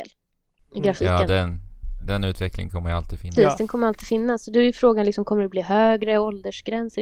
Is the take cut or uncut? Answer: cut